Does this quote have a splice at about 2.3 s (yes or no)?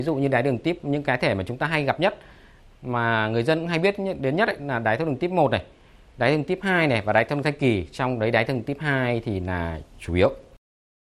no